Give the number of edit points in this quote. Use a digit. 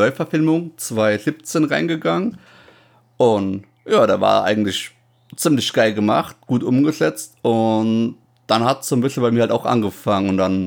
0